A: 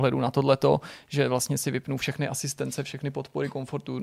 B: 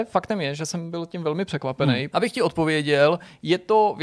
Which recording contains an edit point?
B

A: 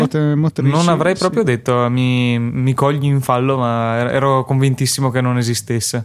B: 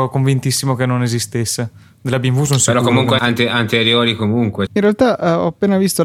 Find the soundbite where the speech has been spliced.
B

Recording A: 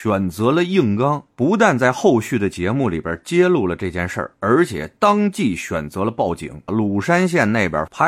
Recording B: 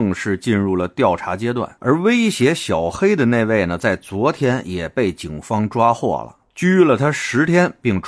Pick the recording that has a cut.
A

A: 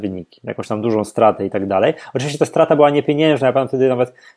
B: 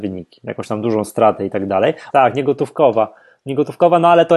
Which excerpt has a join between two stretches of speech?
B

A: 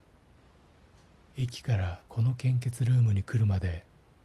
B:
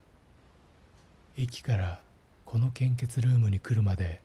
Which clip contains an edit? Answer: A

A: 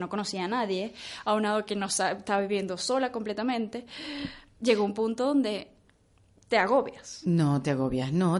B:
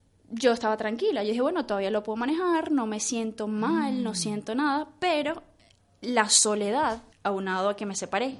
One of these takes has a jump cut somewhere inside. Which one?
B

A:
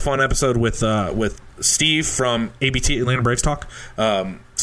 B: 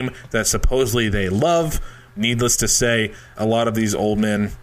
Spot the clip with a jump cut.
B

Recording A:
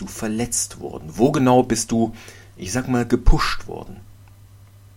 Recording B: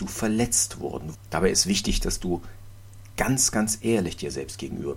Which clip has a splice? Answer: B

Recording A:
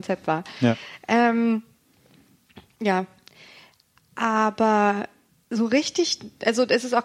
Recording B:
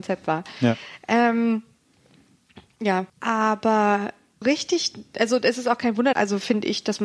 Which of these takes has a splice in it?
B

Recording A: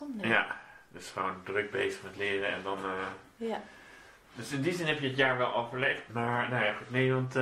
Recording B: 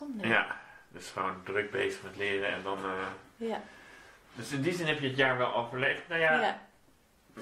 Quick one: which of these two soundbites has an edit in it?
A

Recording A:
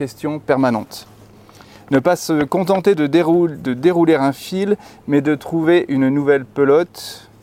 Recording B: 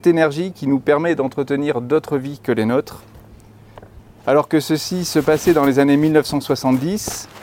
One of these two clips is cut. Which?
B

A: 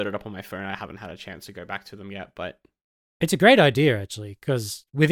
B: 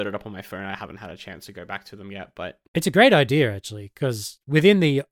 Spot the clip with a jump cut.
B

